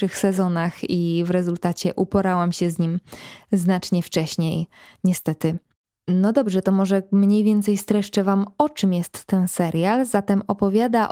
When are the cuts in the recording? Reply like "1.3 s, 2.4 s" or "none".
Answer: none